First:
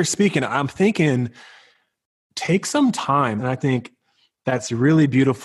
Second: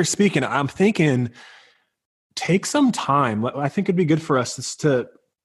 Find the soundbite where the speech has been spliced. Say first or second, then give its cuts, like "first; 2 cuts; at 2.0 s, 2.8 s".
first; 1 cut; at 3.4 s